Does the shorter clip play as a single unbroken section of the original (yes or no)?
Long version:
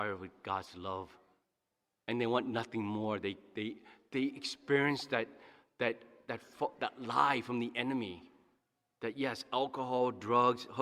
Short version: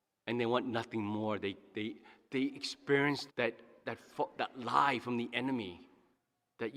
no